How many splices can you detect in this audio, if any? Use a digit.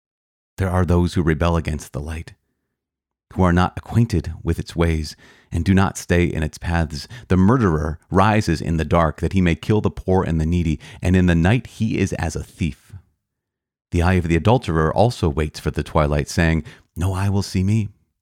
0